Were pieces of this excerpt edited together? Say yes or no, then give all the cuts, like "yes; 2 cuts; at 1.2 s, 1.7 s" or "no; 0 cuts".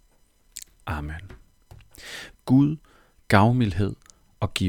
yes; 1 cut; at 2.3 s